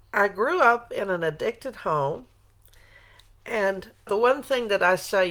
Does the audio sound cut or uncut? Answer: cut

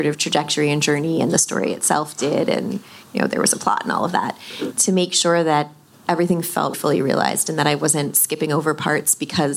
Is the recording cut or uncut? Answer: cut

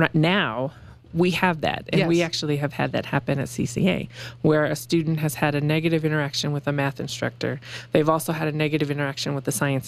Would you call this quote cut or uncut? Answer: uncut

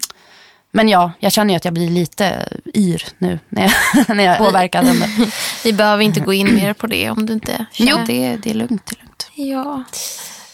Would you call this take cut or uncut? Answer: cut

